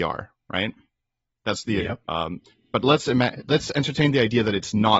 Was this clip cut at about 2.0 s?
yes; 1 cut; at 2.0 s

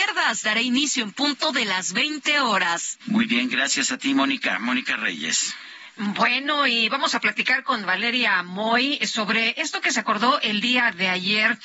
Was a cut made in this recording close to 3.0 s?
yes; 1 cut; at 3.0 s

